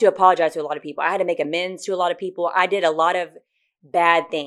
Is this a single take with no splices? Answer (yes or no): yes